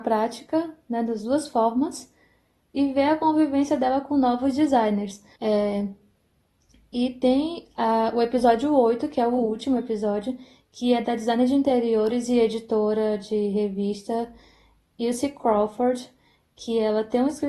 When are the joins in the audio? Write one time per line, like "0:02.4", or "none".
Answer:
0:05.4